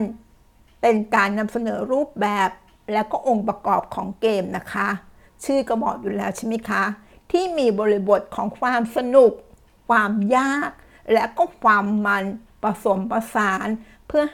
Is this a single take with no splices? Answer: yes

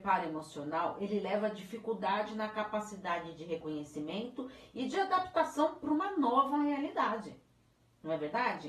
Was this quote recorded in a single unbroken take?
yes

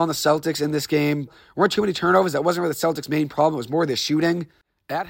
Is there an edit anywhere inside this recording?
yes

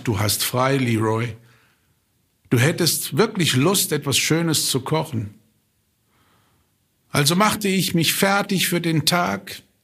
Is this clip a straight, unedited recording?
yes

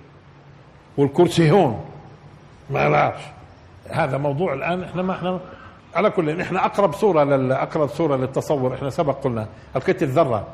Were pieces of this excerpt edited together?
yes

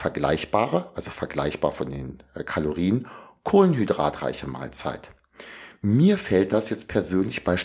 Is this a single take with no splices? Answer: yes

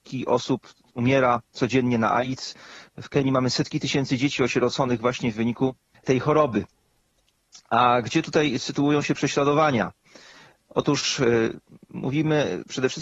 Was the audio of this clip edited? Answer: no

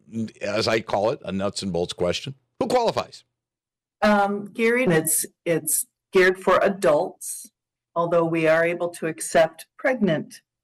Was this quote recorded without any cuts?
no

